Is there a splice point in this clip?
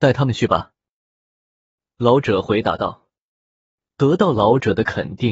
no; 0 cuts

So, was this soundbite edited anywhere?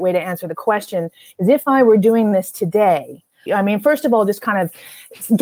yes; 1 cut; at 3.5 s

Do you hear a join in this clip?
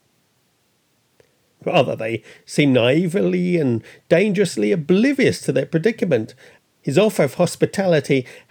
yes; 2 cuts; at 1.5 s, 6.6 s

